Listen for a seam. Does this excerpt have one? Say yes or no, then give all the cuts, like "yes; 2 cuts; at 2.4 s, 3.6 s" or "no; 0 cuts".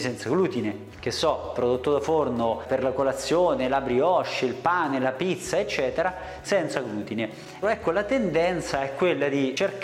yes; 2 cuts; at 0.9 s, 7.6 s